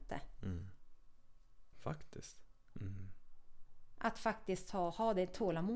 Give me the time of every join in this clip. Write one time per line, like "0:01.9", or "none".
0:01.7
0:02.8